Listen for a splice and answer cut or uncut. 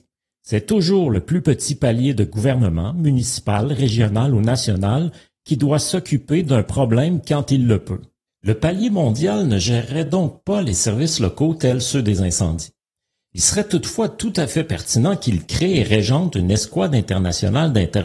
uncut